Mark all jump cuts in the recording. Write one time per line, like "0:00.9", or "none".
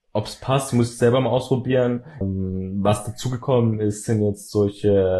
0:02.2